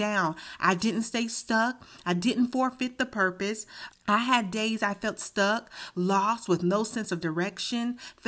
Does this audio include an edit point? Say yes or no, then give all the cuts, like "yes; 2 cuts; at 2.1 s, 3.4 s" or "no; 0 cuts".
yes; 1 cut; at 3.9 s